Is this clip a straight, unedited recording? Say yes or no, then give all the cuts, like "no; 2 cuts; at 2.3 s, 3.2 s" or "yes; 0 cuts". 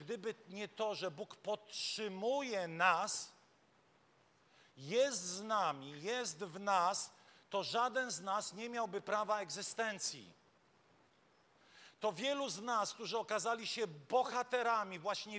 yes; 0 cuts